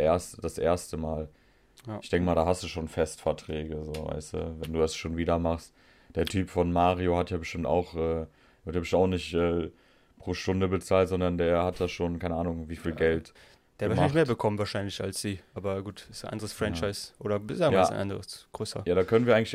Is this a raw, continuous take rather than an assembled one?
yes; 0 cuts

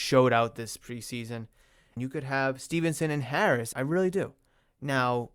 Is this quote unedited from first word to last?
no; 2 cuts; at 2.0 s, 3.7 s

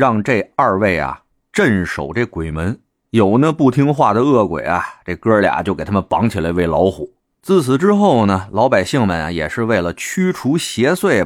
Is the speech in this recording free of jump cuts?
yes; 0 cuts

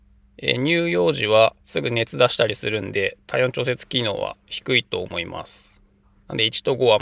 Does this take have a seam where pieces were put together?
yes; 1 cut; at 1.6 s

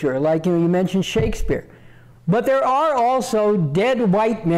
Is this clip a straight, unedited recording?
no; 1 cut; at 2.1 s

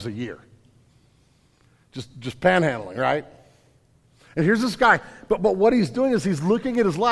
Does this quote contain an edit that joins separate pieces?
no; 0 cuts

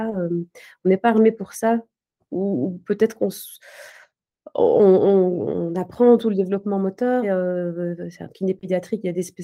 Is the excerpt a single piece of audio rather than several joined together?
no; 1 cut; at 7.2 s

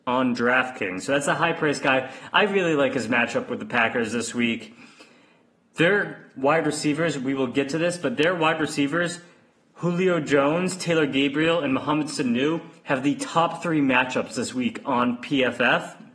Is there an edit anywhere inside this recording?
no; 0 cuts

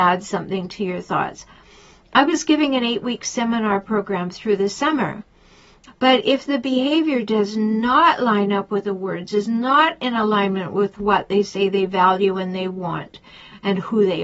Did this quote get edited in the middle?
yes; 1 cut; at 5.9 s

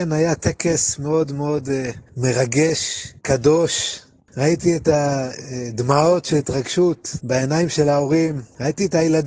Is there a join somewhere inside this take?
yes; 1 cut; at 3.2 s

